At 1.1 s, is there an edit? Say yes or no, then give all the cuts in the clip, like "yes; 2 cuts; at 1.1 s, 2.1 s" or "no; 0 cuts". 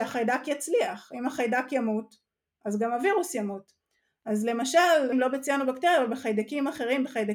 no; 1 cut; at 5.1 s